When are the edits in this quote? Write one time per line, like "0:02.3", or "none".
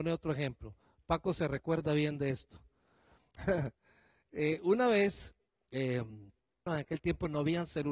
0:06.7